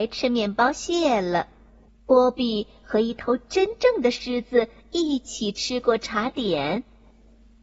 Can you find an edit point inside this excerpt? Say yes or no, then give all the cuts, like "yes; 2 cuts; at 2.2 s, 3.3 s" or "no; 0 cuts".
yes; 1 cut; at 1.9 s